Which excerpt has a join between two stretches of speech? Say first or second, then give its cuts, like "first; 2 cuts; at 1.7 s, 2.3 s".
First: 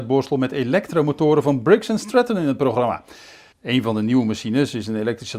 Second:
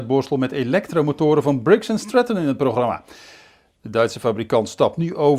first; 1 cut; at 3.5 s